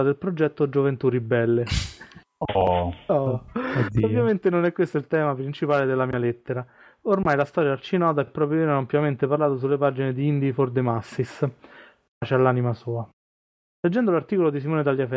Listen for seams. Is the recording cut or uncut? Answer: uncut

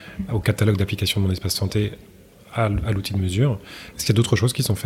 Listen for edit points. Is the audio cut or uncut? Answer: uncut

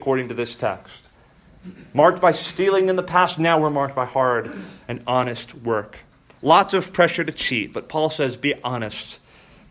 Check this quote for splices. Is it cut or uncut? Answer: uncut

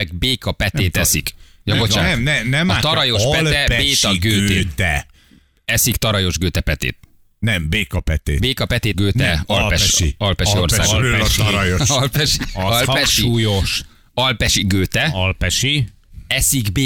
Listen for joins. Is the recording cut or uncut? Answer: cut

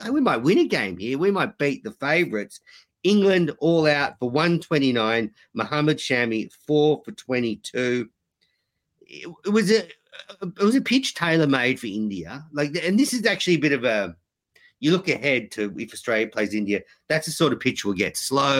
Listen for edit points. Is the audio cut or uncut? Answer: uncut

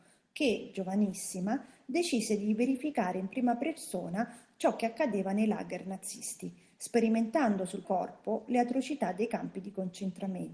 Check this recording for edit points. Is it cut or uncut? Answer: cut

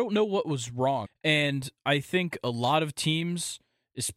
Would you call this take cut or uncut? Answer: cut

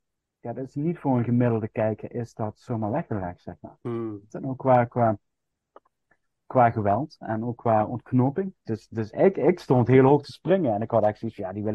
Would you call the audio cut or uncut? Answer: cut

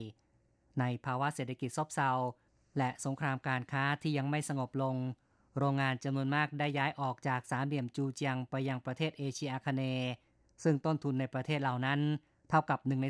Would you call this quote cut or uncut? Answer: uncut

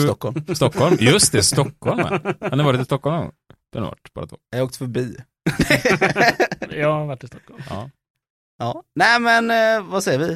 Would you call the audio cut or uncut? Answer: uncut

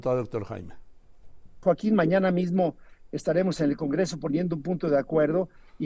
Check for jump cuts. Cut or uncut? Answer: cut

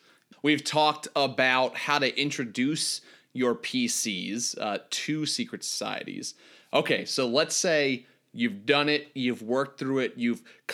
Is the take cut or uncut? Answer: uncut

